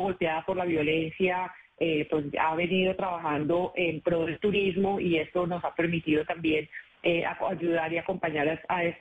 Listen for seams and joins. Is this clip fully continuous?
yes; 0 cuts

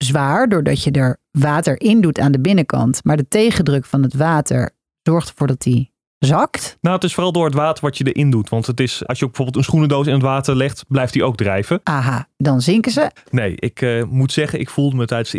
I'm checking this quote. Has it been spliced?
yes; 3 cuts; at 9.0 s, 11.8 s, 13.2 s

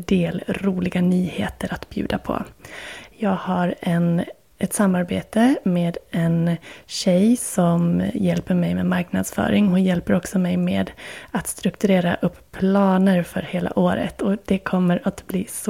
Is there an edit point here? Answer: no; 0 cuts

